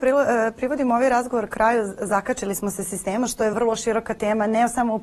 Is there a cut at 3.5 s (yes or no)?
yes